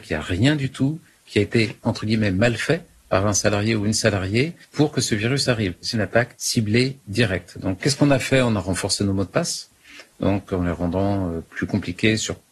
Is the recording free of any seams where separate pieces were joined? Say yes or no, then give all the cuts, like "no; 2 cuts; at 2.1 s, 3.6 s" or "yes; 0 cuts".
no; 1 cut; at 5.9 s